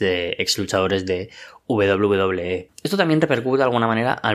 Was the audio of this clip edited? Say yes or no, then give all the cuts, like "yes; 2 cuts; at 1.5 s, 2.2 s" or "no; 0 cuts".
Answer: yes; 1 cut; at 2.7 s